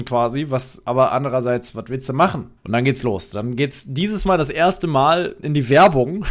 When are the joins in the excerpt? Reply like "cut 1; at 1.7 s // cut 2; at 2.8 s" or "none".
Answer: cut 1; at 2.6 s